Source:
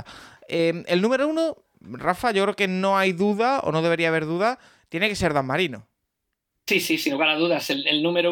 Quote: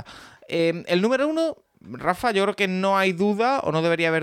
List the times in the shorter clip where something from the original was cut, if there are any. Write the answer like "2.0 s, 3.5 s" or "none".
none